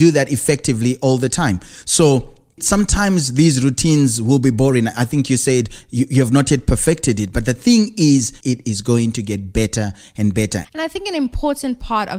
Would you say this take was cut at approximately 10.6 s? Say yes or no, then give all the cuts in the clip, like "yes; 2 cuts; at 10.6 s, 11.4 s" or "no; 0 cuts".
yes; 2 cuts; at 8.4 s, 10.6 s